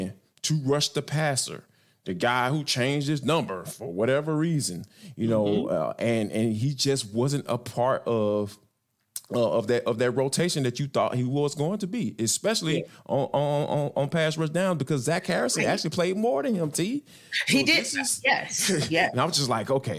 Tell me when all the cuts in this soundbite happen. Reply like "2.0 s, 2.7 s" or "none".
none